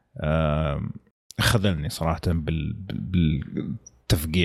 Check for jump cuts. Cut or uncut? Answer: uncut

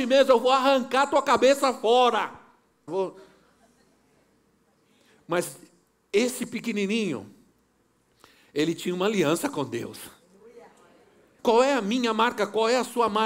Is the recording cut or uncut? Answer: cut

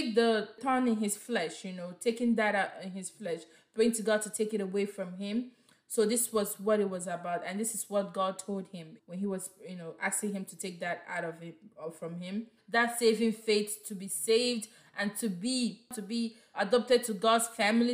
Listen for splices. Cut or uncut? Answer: cut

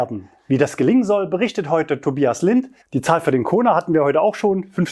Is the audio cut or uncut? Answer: cut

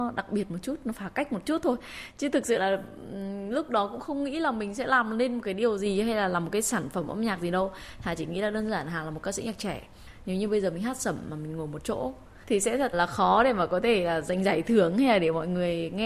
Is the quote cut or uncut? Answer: cut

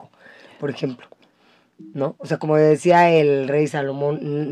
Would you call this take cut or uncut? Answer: uncut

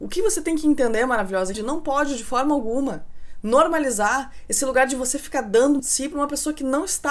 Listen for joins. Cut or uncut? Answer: cut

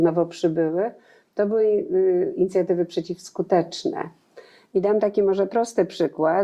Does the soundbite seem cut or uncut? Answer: uncut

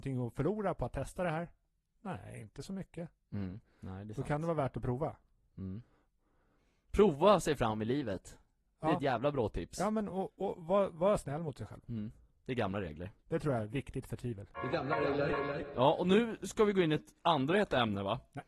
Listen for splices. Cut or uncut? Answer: uncut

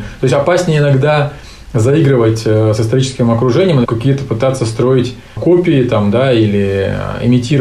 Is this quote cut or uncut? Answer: cut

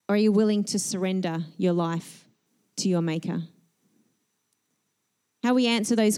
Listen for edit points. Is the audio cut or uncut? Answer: uncut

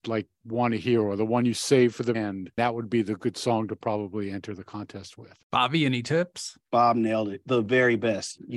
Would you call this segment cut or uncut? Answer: cut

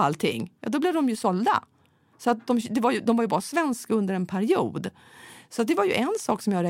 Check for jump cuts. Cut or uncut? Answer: uncut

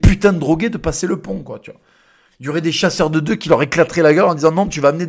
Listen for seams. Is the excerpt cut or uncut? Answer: cut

